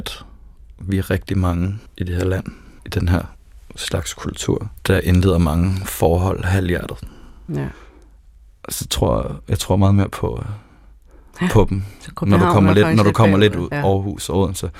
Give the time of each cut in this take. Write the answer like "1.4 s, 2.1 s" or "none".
4.8 s, 7.5 s, 13.7 s

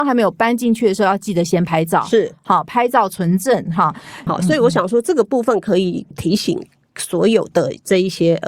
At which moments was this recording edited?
4.3 s

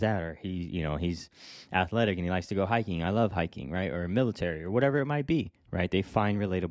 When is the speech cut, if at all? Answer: none

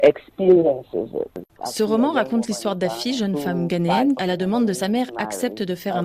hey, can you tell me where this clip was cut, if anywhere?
1.6 s, 4.2 s

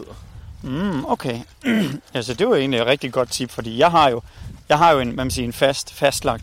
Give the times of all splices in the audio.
none

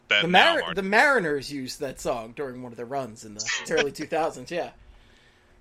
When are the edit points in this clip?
3.6 s

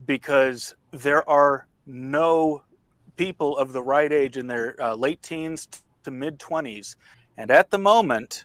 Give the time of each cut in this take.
7.1 s

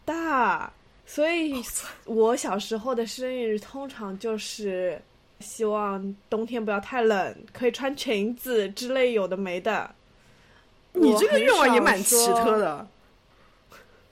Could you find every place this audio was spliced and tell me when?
1.0 s, 5.4 s

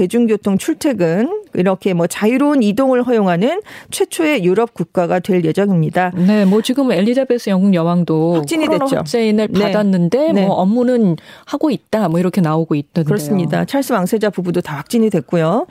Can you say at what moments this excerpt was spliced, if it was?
none

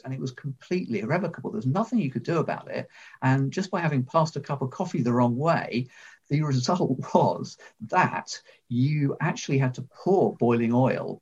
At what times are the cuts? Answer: none

